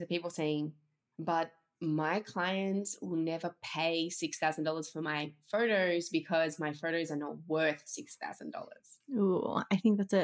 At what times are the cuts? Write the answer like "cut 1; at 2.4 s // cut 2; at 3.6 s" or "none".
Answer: none